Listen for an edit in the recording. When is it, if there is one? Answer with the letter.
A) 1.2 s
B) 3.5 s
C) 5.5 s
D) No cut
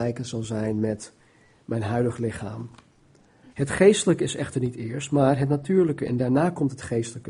B